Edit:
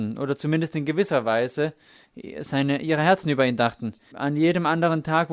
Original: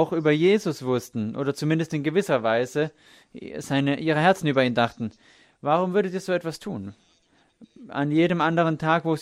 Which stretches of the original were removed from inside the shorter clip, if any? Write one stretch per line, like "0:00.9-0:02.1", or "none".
0:05.3-0:07.9